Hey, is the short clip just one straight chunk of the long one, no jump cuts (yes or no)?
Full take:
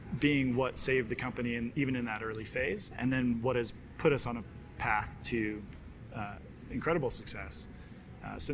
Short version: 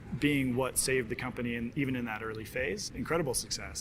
no